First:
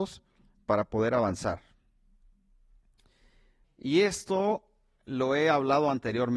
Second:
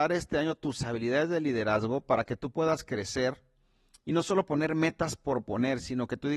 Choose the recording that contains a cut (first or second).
first